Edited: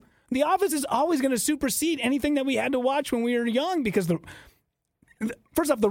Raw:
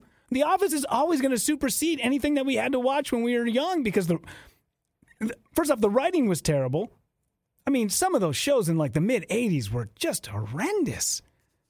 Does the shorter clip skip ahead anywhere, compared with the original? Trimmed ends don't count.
no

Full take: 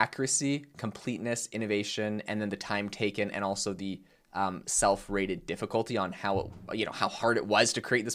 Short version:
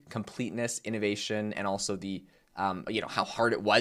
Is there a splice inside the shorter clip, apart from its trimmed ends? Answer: yes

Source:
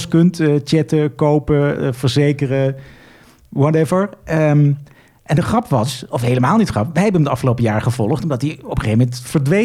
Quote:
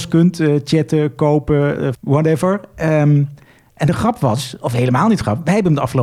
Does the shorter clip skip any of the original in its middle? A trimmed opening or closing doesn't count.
yes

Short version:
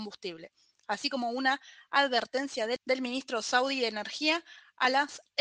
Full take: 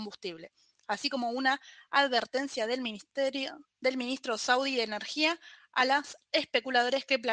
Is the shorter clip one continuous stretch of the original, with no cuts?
no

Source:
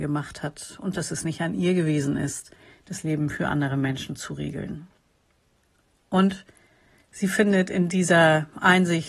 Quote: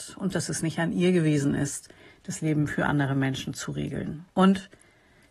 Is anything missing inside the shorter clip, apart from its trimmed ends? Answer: yes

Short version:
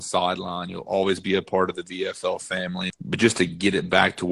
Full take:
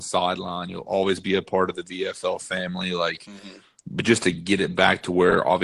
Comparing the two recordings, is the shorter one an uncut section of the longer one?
no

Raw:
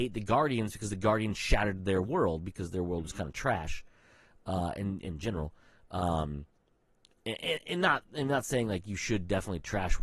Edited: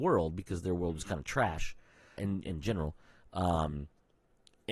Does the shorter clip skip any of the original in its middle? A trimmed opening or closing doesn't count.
yes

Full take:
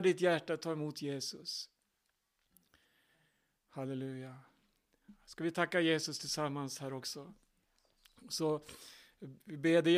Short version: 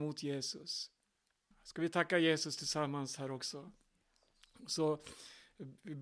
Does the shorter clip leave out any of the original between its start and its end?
yes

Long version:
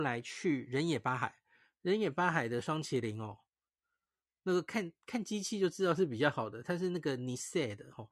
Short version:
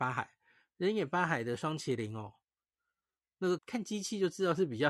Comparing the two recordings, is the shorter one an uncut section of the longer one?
no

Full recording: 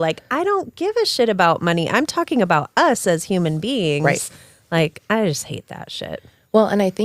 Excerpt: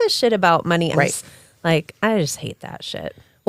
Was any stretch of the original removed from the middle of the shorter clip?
yes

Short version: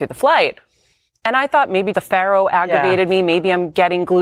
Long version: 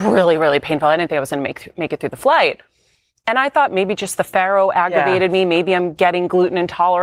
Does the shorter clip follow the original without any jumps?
no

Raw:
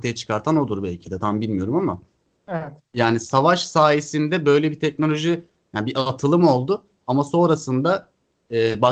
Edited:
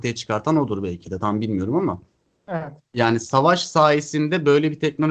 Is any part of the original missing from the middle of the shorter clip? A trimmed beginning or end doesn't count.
no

